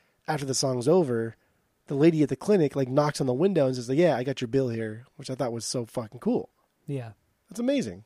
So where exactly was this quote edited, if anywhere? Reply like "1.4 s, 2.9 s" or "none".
none